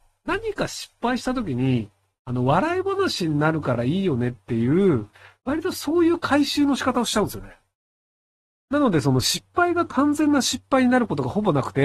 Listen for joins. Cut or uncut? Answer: uncut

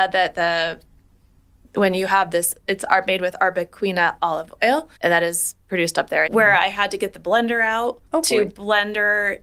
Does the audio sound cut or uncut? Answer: cut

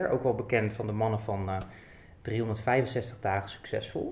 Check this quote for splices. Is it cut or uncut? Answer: uncut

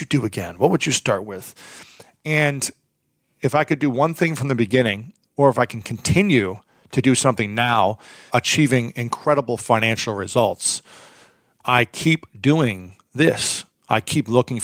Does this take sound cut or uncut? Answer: cut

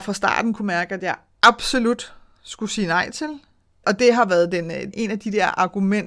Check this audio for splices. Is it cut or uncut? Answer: cut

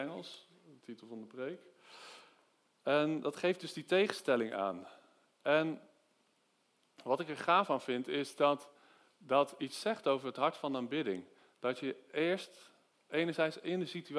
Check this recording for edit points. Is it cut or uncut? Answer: uncut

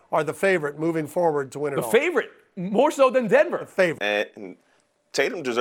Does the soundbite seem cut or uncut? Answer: cut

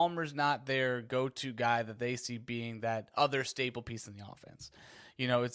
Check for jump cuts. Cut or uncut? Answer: uncut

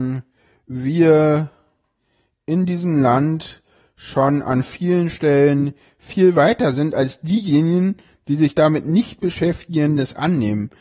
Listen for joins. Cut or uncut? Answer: uncut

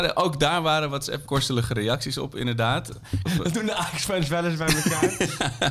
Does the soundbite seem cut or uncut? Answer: cut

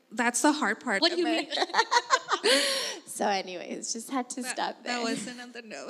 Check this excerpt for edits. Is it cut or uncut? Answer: cut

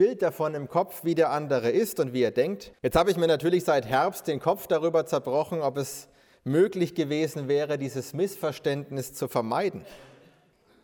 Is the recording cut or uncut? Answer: cut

